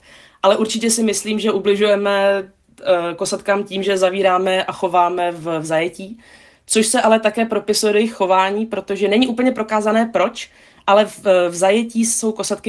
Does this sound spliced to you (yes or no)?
no